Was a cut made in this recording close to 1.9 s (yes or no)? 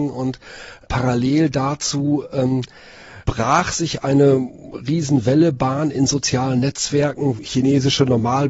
no